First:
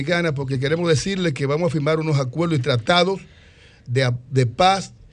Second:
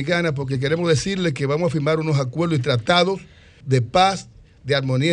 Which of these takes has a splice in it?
second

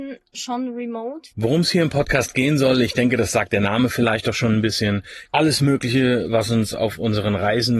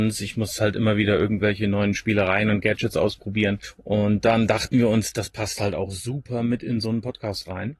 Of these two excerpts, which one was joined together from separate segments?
first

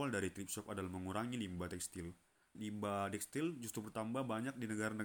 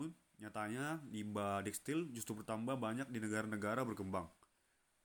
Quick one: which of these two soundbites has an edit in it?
first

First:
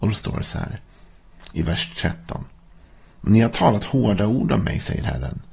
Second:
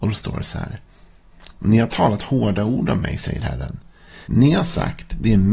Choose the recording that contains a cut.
second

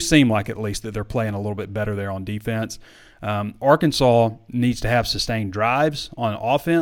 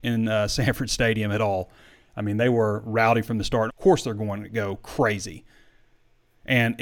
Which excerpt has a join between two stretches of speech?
second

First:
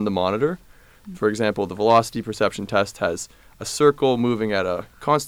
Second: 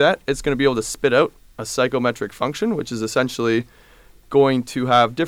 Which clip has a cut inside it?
first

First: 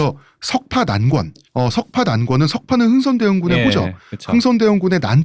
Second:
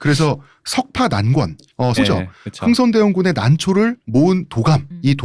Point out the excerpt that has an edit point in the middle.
second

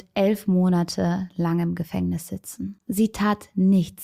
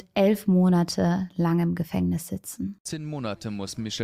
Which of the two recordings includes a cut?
first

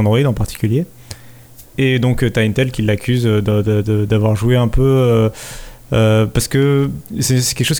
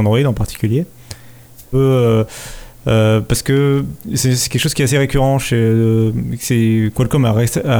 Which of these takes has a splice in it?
second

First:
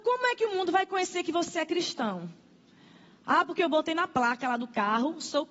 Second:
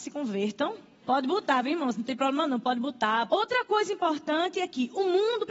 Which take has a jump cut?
second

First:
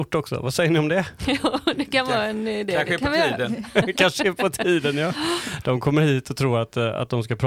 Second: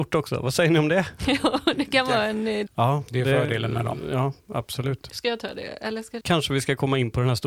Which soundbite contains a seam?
second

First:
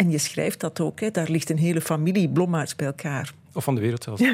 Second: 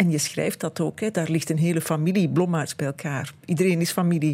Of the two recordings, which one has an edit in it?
first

